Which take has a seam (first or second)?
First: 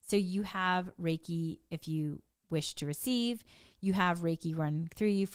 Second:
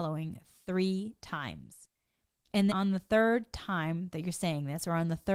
second